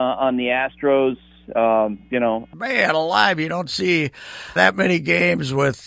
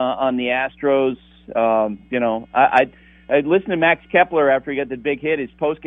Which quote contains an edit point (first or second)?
first